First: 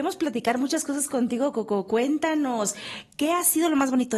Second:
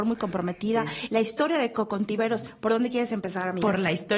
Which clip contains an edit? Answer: second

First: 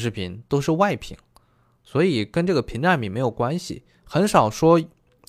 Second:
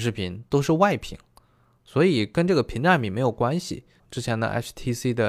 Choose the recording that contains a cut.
second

